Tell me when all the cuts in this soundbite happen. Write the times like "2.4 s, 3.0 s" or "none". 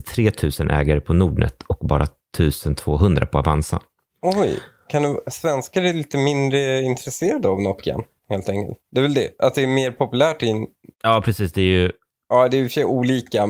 8.8 s